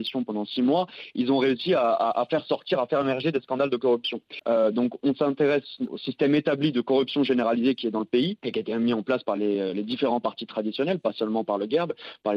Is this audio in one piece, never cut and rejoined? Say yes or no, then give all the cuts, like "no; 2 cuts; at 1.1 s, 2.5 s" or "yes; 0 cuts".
yes; 0 cuts